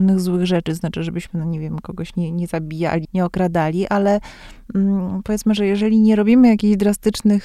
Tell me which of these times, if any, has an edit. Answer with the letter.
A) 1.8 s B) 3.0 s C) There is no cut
B